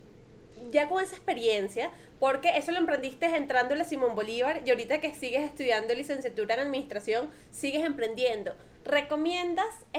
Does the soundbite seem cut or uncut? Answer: uncut